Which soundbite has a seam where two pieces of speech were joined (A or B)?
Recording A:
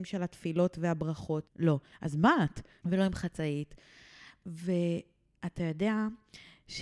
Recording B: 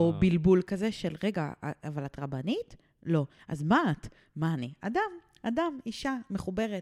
A